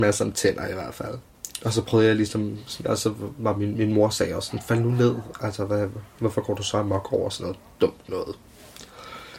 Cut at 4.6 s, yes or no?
no